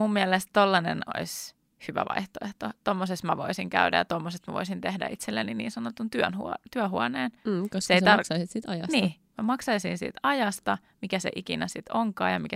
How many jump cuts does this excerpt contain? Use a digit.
0